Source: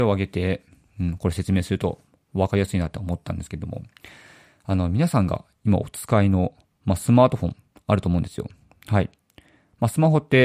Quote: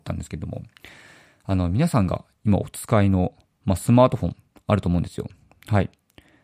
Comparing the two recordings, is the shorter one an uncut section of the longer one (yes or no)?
yes